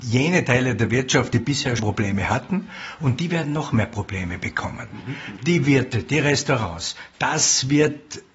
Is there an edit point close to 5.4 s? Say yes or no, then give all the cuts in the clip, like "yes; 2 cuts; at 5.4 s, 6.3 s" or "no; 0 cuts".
no; 2 cuts; at 1.8 s, 7.1 s